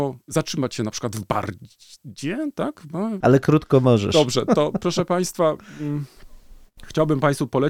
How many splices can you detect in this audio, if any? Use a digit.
1